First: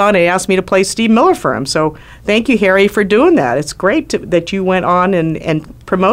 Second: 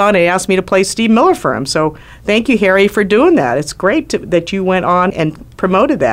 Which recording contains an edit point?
second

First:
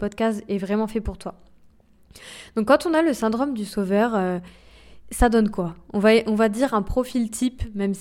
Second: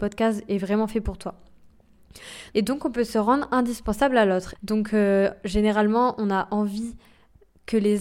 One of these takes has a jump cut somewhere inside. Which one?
second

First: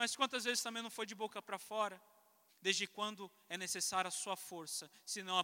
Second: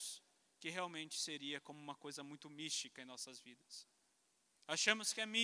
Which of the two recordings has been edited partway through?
first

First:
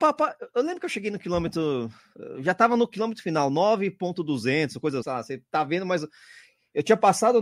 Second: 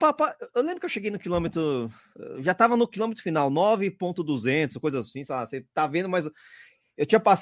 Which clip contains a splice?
first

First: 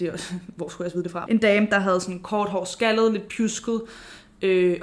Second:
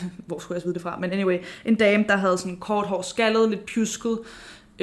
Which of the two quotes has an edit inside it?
first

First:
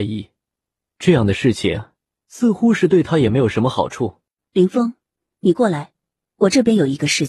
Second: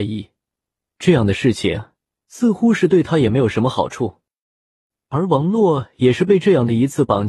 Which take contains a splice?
first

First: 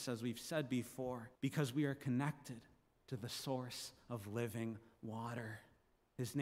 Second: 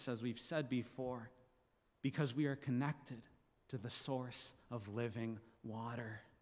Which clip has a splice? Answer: first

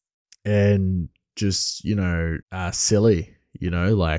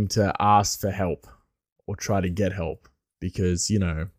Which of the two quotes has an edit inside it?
first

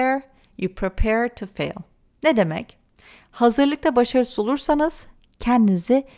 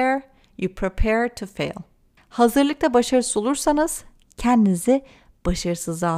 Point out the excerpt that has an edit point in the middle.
second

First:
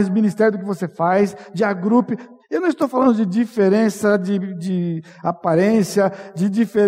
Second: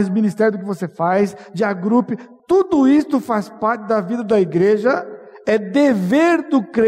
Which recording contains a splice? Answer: first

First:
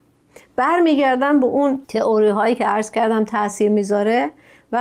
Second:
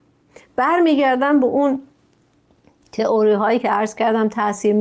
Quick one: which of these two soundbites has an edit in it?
first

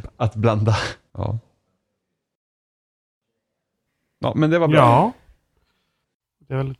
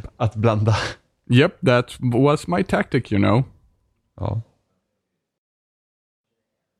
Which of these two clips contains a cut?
first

